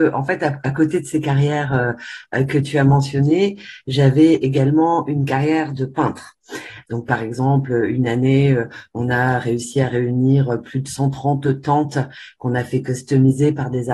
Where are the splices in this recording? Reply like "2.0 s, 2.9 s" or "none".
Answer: 6.8 s